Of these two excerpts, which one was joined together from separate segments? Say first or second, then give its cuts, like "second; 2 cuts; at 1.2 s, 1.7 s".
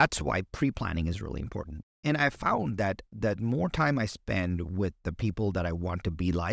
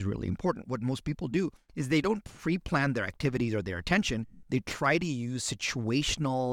first; 1 cut; at 1.8 s